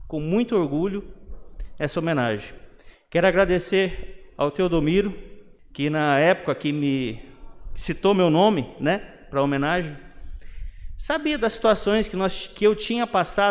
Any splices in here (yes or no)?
no